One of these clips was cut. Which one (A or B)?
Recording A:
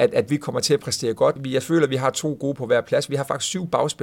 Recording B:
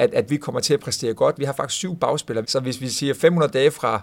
B